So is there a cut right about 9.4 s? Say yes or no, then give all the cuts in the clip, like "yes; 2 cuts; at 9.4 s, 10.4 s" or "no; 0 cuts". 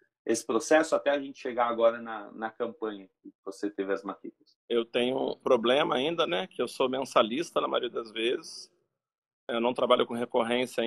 no; 1 cut; at 5.4 s